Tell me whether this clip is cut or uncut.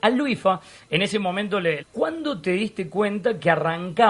cut